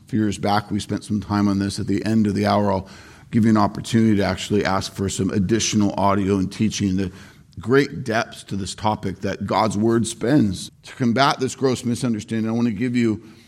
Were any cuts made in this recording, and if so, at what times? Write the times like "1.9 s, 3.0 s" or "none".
10.7 s